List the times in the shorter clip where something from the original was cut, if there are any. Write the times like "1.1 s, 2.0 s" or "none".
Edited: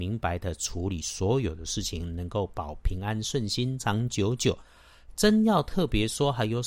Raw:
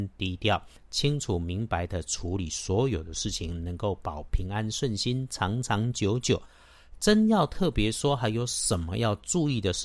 3.8 s